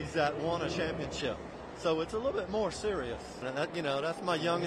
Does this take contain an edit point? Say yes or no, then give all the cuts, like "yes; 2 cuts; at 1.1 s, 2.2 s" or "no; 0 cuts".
yes; 1 cut; at 3.4 s